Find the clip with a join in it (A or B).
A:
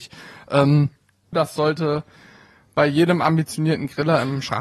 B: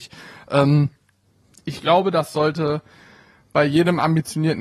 A